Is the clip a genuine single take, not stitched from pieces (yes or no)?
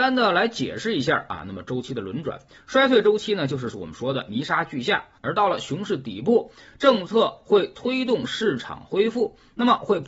no